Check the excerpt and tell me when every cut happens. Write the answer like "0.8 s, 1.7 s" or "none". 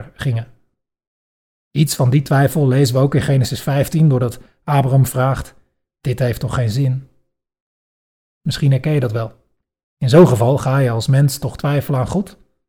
1.5 s, 9.8 s